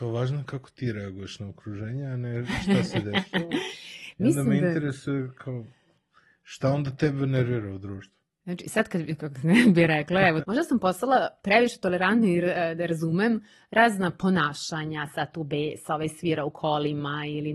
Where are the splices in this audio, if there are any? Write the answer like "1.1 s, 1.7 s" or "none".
10.4 s